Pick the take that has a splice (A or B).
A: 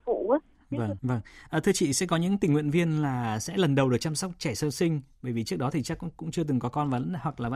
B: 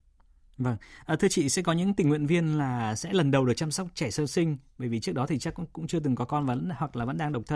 A